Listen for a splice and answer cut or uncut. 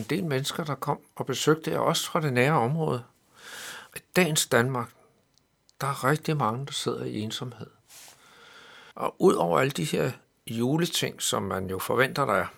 cut